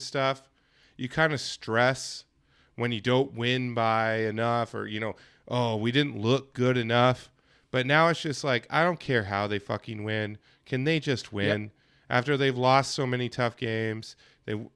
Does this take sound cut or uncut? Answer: uncut